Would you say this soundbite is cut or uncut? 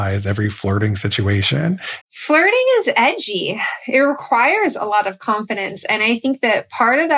cut